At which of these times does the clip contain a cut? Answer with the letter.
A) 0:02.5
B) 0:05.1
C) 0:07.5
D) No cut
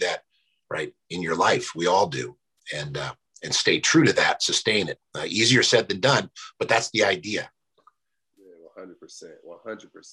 D